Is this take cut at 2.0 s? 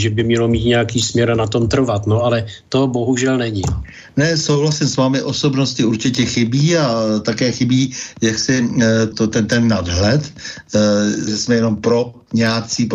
no; 2 cuts; at 9.1 s, 11.3 s

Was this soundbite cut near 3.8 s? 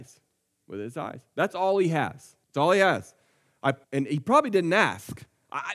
yes; 2 cuts; at 2.4 s, 3.8 s

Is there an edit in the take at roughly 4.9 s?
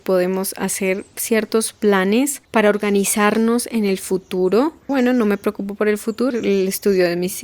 yes; 3 cuts; at 2.4 s, 4.9 s, 6.3 s

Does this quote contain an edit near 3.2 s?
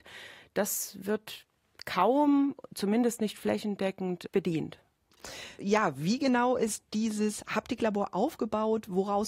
no; 1 cut; at 5.6 s

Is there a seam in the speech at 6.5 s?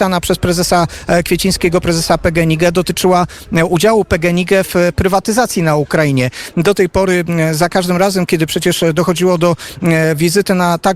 yes; 1 cut; at 6.5 s

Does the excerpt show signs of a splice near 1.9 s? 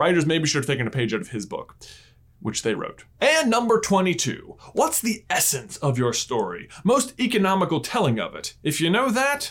no; 0 cuts

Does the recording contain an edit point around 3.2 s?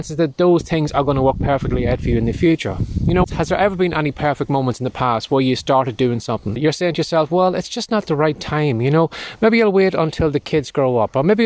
yes; 2 cuts; at 3.2 s, 6.6 s

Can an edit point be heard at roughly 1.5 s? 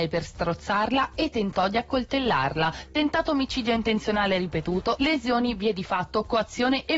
no; 2 cuts; at 2.9 s, 5.0 s

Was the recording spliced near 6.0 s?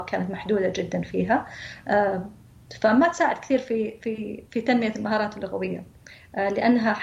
no; 1 cut; at 4.5 s

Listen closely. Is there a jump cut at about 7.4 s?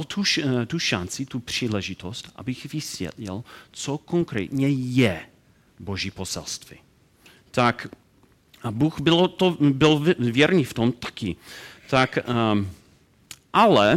yes; 1 cut; at 7.4 s

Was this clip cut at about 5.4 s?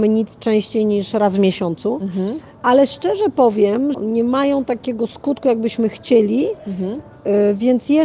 no; 1 cut; at 3.9 s

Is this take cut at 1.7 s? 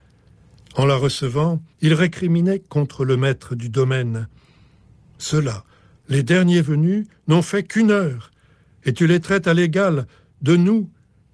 yes; 1 cut; at 1.7 s

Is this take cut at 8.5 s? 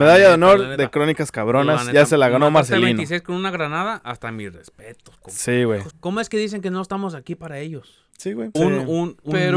yes; 2 cuts; at 5.9 s, 8.5 s

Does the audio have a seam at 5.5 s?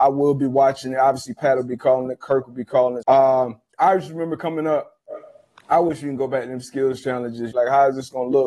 no; 2 cuts; at 3.0 s, 7.5 s

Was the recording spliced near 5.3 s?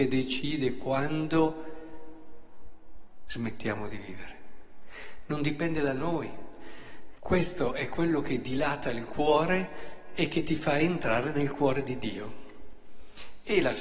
no; 1 cut; at 7.2 s

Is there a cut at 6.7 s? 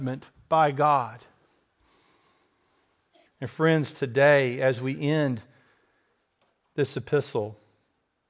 no; 1 cut; at 3.3 s

